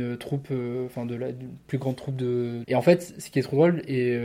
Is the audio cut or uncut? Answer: cut